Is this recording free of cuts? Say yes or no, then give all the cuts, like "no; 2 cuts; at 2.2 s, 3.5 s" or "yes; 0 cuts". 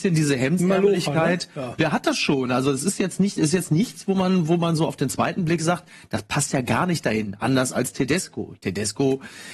yes; 0 cuts